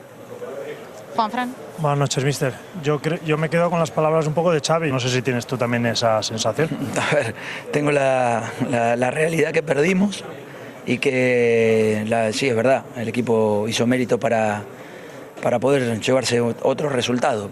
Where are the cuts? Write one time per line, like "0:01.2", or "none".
0:04.9